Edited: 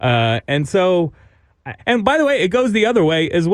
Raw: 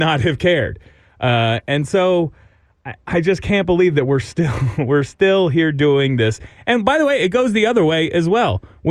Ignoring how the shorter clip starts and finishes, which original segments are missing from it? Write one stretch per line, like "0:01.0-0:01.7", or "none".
0:03.0-0:06.6

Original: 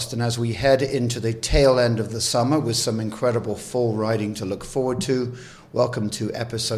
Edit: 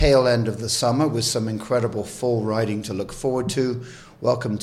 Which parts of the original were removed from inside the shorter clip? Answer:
none

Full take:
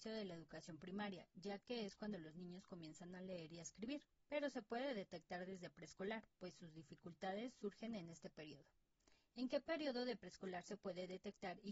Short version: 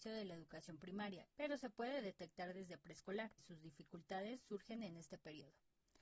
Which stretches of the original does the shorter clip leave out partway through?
0:01.3-0:04.2
0:06.3-0:06.5

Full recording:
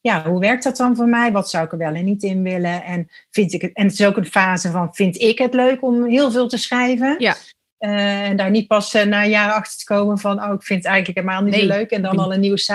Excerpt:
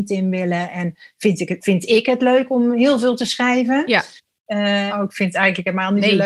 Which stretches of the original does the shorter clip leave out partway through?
0:03.7-0:04.9
0:08.2-0:10.4

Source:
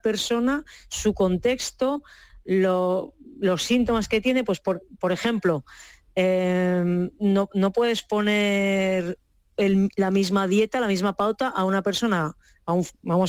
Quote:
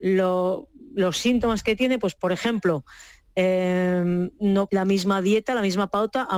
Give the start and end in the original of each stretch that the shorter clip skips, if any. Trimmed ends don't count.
0:04.6-0:05.0
0:07.5-0:09.9

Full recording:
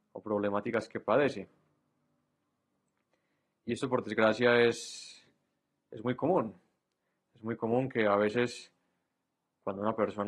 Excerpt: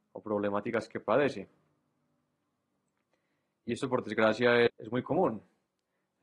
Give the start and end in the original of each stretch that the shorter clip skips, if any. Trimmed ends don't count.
0:04.7-0:05.8

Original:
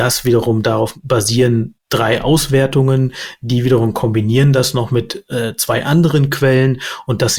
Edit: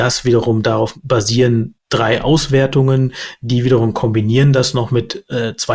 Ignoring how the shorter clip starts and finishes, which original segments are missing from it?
none

